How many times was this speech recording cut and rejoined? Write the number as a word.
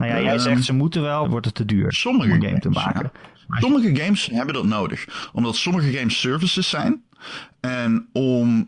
one